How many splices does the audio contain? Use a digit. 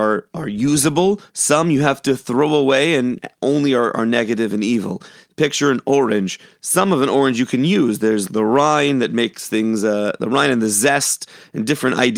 1